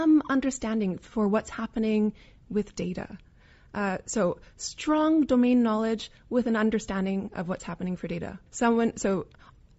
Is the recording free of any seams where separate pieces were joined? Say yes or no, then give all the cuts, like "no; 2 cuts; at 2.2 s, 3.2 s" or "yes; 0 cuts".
no; 1 cut; at 8.5 s